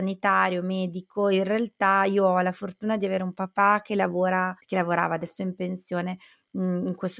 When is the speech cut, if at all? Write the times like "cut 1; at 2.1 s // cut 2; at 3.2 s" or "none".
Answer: cut 1; at 4.6 s